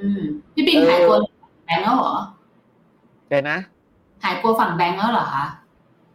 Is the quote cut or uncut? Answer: uncut